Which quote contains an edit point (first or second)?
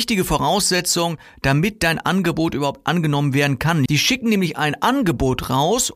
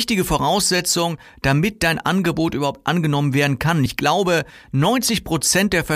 first